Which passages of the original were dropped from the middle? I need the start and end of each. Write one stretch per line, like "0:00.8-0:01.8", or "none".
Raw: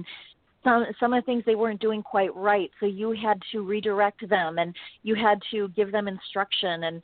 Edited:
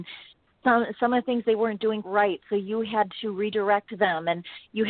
0:02.0-0:02.3